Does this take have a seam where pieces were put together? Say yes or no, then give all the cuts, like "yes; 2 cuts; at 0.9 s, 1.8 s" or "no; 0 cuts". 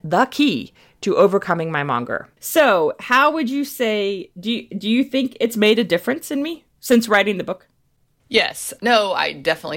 yes; 3 cuts; at 2.3 s, 6.7 s, 8.8 s